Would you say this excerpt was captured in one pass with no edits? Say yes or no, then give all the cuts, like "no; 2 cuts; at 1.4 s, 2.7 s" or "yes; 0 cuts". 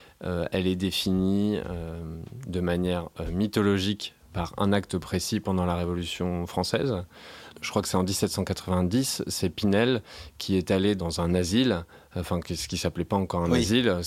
yes; 0 cuts